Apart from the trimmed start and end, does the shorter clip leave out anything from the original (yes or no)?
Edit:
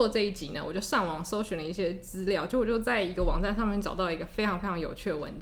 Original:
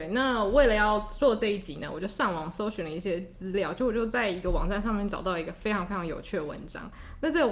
no